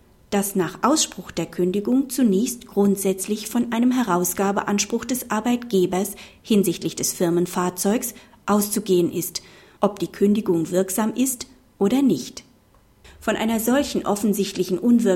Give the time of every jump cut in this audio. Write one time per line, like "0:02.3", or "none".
0:09.8
0:13.0